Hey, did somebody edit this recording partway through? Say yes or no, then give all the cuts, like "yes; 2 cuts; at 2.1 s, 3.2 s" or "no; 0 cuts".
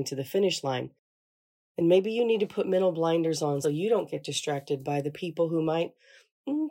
yes; 1 cut; at 3.6 s